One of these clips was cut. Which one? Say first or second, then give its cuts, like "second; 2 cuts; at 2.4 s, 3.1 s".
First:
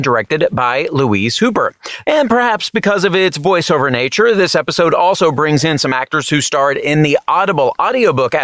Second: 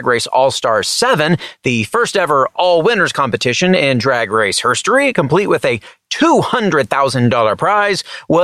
first; 1 cut; at 2.0 s